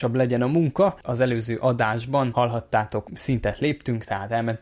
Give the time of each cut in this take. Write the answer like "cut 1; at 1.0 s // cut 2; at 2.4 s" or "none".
cut 1; at 1.0 s // cut 2; at 3.0 s